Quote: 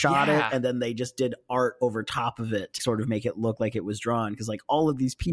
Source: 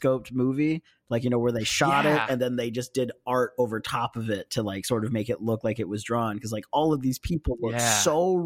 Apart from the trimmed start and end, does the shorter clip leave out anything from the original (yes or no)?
yes